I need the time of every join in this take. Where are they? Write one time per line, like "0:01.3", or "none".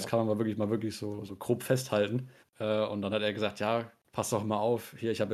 0:02.4

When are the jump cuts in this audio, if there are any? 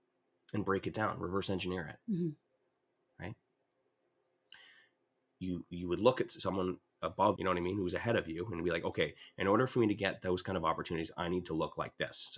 0:05.2
0:07.4

